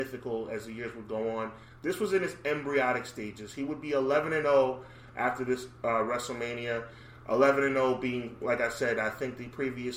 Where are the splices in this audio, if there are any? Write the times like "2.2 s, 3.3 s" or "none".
none